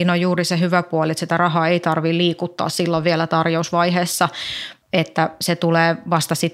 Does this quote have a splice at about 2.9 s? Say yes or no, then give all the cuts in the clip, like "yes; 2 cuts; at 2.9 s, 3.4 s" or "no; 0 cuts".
no; 1 cut; at 4.8 s